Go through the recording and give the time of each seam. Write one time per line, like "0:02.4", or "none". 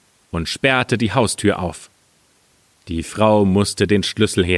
none